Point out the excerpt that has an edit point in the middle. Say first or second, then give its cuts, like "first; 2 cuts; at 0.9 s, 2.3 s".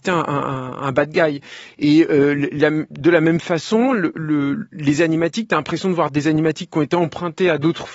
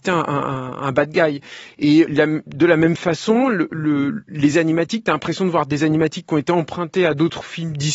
second; 1 cut; at 2.1 s